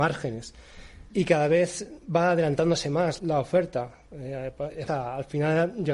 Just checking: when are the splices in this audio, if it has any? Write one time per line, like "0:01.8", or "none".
0:01.1
0:03.2
0:04.9